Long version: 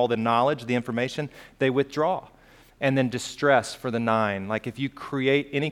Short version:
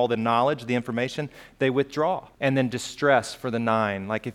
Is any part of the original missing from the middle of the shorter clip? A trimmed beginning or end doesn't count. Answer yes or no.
yes